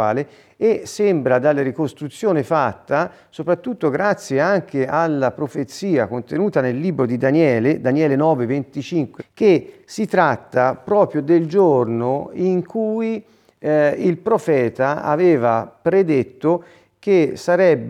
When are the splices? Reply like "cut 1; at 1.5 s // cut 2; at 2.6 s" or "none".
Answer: cut 1; at 9.2 s